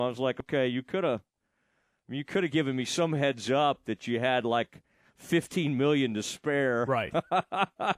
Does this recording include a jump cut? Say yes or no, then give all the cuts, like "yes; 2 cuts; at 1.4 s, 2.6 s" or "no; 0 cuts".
no; 0 cuts